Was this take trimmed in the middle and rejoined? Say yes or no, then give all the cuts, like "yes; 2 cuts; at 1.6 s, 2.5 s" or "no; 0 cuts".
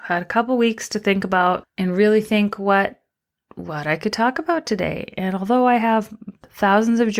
yes; 1 cut; at 1.6 s